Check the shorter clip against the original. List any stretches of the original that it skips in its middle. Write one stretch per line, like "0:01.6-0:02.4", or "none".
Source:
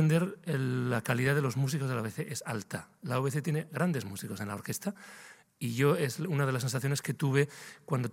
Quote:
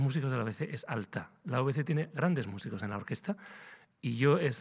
none